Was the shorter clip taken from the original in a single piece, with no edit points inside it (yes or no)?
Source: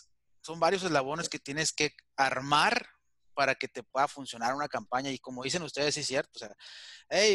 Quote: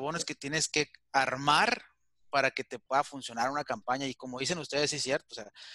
yes